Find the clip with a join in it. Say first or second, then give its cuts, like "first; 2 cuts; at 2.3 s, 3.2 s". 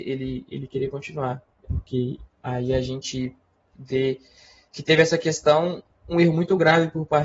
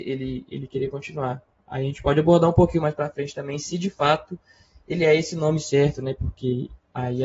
first; 1 cut; at 1.6 s